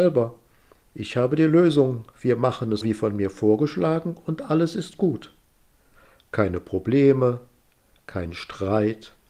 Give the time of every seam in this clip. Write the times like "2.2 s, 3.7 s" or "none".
2.8 s